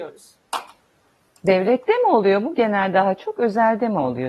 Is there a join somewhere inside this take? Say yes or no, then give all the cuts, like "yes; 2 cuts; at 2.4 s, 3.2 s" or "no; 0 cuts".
no; 0 cuts